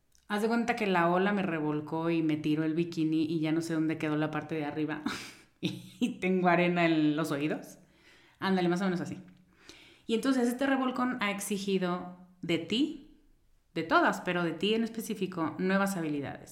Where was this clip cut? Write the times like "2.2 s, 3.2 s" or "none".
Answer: none